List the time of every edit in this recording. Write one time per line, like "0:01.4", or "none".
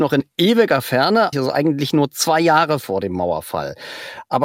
0:01.3